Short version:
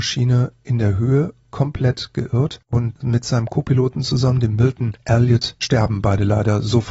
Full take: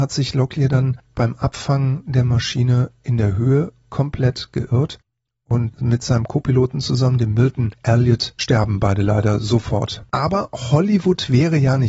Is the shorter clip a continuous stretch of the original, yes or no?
no